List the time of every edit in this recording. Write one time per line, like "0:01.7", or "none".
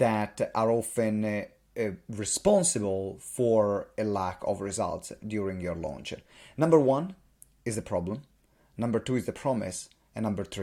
none